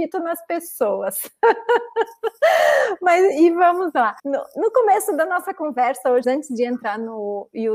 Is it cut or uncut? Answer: cut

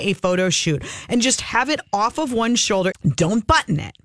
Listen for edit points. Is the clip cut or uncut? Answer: cut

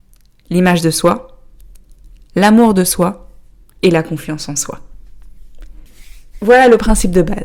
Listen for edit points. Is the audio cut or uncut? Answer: uncut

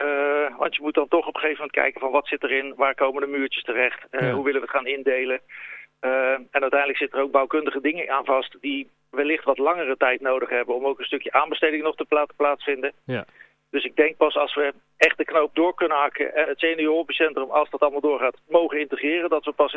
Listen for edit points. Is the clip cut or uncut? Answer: cut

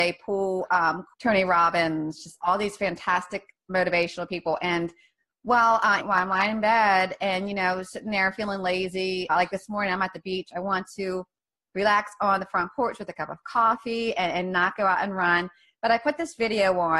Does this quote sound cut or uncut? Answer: cut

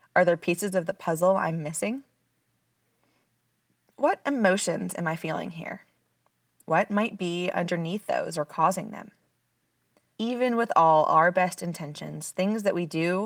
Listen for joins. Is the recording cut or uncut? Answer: cut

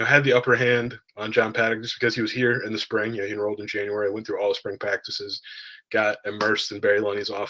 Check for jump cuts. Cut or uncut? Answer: cut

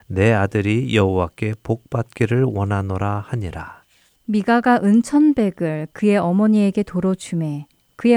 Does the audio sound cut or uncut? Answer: uncut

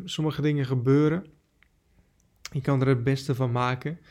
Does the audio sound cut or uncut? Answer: uncut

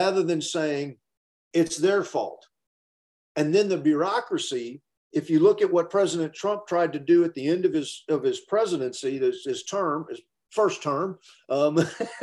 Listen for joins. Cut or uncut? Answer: uncut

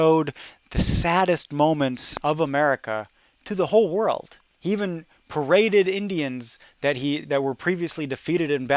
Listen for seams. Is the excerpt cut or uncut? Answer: uncut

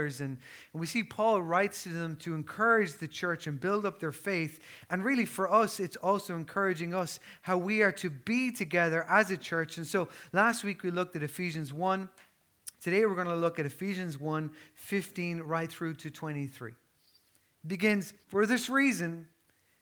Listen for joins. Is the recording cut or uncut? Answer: cut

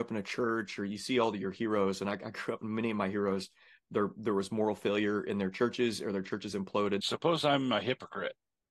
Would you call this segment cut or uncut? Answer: cut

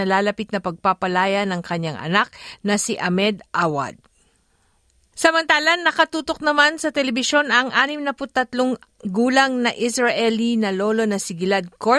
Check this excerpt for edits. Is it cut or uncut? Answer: cut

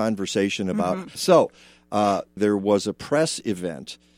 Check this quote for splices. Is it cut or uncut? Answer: cut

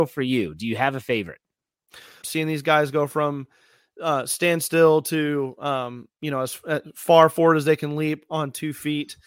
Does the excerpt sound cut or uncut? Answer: cut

